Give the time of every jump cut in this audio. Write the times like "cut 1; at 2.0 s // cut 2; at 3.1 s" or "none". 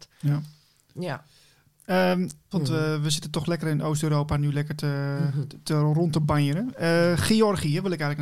cut 1; at 2.5 s